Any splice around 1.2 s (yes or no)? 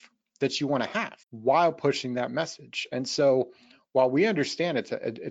yes